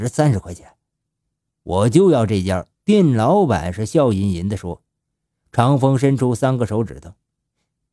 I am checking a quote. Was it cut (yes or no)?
yes